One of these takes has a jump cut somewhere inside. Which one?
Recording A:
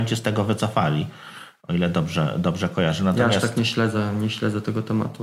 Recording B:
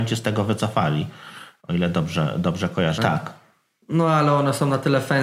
B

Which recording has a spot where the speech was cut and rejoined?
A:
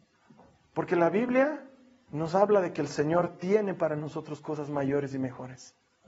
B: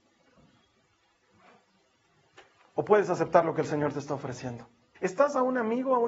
B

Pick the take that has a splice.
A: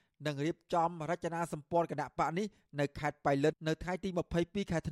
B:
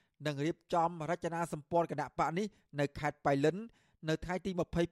A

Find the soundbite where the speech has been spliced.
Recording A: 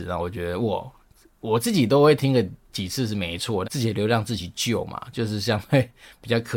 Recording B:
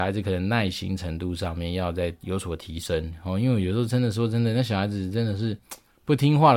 A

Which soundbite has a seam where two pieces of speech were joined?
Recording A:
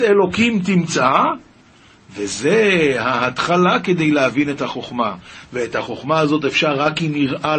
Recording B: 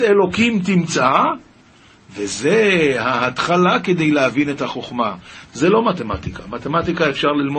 B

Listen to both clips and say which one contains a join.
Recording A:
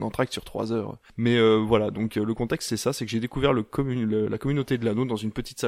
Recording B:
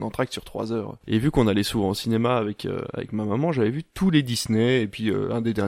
B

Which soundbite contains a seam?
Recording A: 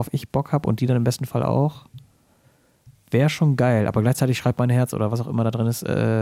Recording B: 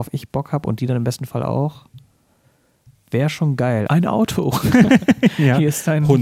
B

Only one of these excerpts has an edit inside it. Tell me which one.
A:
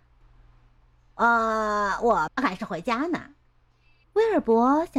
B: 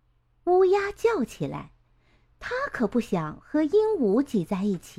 A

